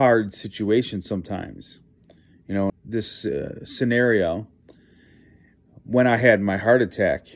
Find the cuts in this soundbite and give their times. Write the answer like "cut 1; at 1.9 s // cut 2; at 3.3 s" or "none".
cut 1; at 2.7 s